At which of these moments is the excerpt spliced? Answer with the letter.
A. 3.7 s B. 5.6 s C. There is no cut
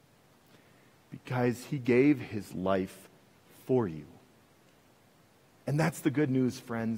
B